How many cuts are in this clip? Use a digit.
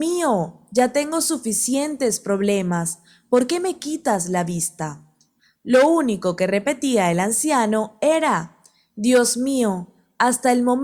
0